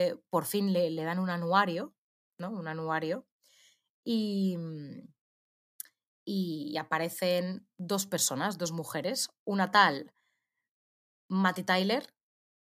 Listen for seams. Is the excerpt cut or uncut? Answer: uncut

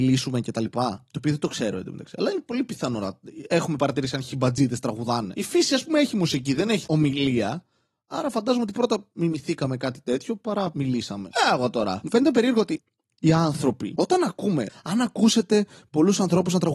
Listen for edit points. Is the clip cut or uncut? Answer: cut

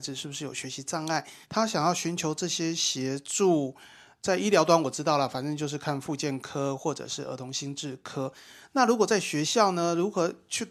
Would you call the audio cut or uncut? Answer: cut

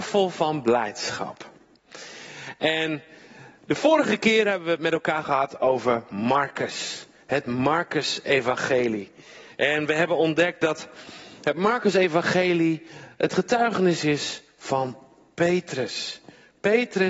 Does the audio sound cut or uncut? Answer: uncut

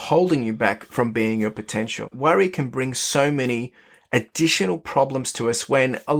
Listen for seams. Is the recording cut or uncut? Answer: cut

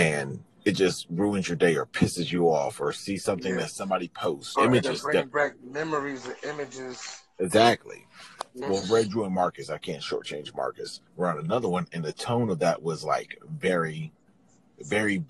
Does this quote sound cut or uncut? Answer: cut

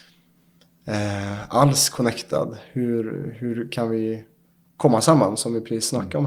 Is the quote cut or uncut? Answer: uncut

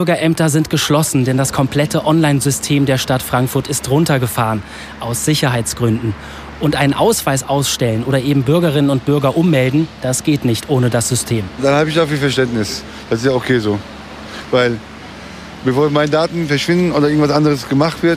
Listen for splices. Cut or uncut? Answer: uncut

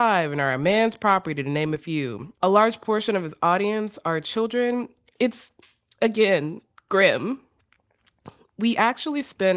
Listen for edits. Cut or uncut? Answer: cut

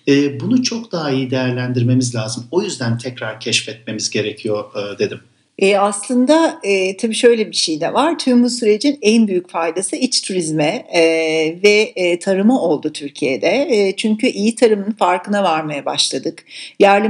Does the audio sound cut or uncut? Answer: uncut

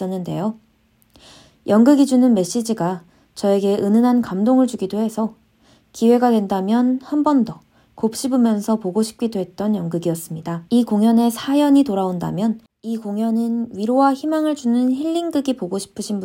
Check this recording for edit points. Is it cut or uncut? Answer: cut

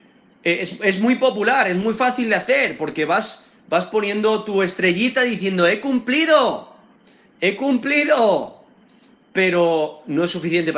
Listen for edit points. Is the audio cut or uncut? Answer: uncut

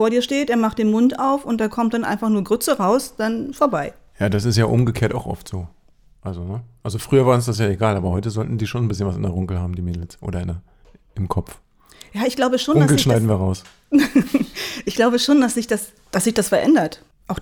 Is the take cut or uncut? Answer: uncut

